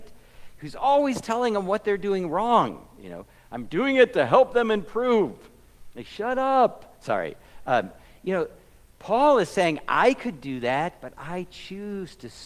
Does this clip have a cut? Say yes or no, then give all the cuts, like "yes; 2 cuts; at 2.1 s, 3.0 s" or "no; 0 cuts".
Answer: no; 0 cuts